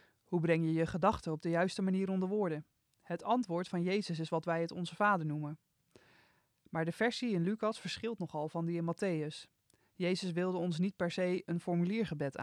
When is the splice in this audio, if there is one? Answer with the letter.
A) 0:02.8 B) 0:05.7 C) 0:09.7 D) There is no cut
D